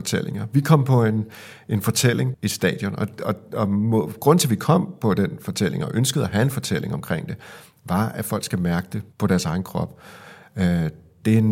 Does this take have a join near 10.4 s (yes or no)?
no